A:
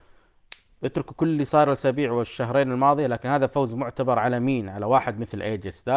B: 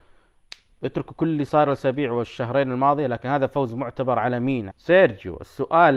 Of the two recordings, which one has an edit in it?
B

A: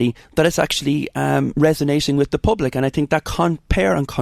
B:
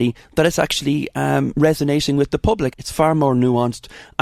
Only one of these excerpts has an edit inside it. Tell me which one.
B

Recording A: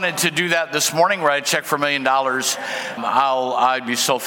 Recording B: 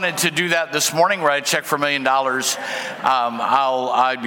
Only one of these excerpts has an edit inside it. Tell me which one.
A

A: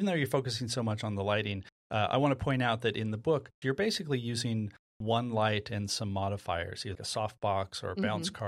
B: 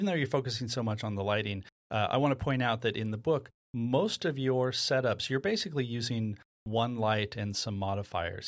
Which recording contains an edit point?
A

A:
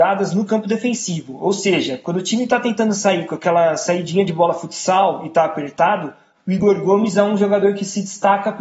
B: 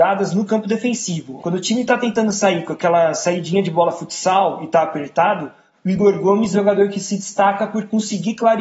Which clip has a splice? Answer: B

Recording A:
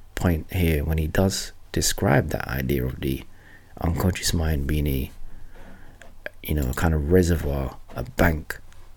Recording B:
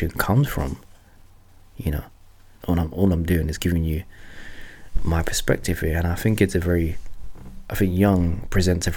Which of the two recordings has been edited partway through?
B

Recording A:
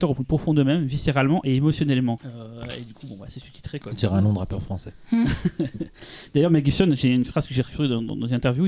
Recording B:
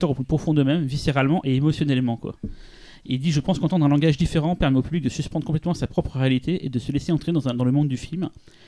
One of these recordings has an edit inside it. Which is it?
A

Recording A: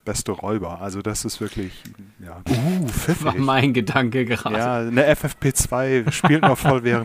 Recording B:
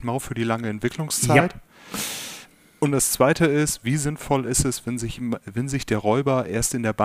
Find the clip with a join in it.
A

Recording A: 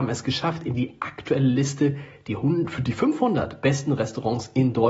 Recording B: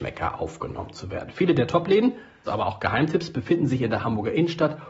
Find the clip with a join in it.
B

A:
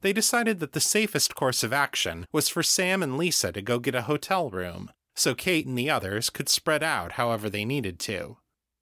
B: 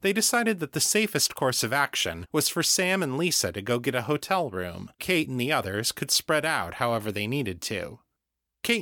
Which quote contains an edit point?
B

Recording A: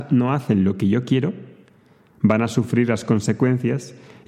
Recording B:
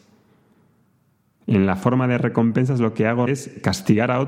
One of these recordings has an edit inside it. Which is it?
B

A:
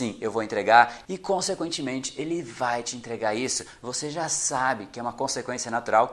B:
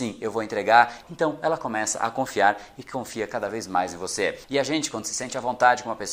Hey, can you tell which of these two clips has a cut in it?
B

